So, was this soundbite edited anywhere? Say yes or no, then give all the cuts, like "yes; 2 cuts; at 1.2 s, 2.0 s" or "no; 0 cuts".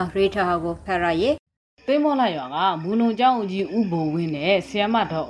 no; 0 cuts